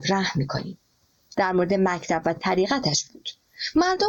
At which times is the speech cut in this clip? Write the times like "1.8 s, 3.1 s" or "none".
1.3 s

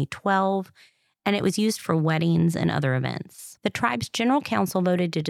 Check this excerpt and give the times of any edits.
3.6 s

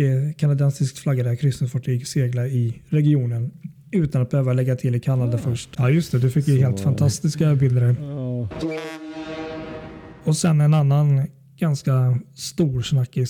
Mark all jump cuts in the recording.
5.8 s

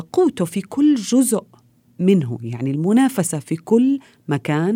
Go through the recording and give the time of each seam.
none

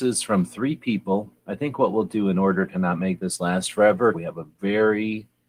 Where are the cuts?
4.1 s

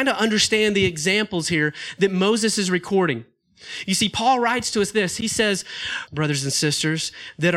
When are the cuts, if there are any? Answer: 6.1 s

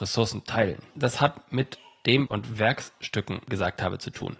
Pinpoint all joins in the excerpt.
0.9 s, 2.3 s

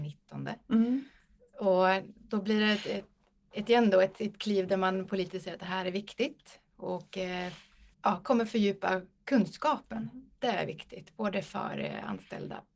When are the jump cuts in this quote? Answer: 7.9 s

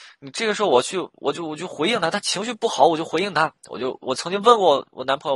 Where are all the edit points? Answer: 4.0 s

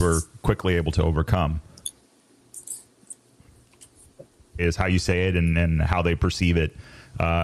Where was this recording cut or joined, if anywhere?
4.6 s

